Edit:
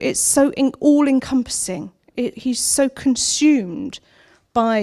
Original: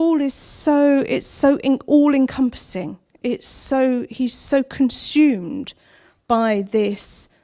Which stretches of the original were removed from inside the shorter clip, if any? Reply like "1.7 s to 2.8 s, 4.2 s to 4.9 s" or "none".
3.4 s to 4.1 s